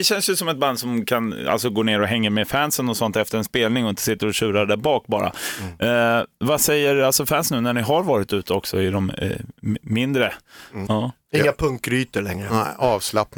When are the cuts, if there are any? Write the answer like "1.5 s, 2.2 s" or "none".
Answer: 10.9 s